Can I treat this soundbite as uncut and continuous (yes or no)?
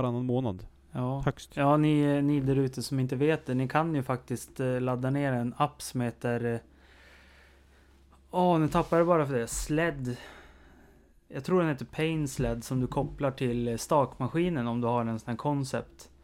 yes